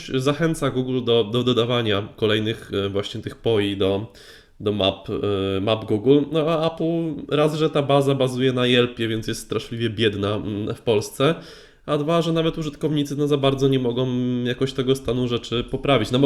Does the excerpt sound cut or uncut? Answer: uncut